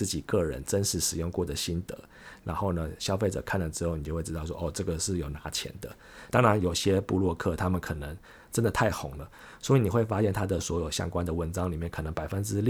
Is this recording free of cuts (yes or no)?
no